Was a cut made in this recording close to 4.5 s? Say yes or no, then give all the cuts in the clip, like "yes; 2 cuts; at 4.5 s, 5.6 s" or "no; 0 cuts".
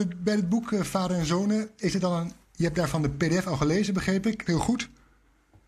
yes; 1 cut; at 4.5 s